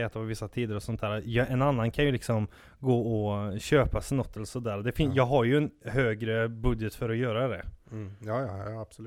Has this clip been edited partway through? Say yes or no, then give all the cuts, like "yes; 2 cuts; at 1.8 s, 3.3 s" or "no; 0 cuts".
no; 0 cuts